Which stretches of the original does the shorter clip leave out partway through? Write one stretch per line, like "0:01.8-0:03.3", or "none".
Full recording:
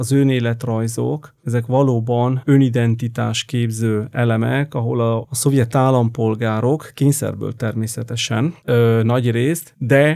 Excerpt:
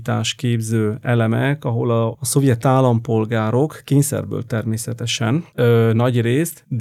none